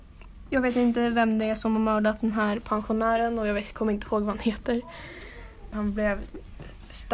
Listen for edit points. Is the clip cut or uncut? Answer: cut